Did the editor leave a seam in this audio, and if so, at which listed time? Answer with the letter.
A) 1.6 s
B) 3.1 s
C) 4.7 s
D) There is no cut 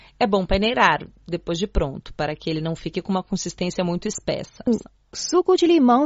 C